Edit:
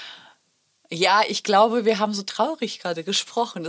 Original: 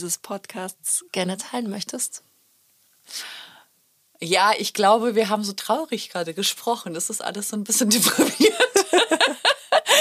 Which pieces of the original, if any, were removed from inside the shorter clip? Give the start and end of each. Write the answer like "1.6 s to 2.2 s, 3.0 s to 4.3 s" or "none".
none